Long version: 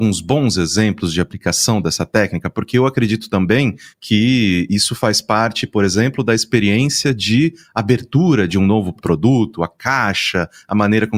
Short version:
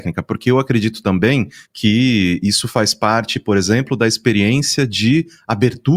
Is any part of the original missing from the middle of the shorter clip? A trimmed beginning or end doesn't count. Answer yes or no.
no